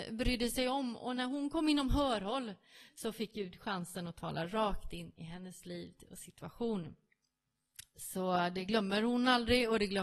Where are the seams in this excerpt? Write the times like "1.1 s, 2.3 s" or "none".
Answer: none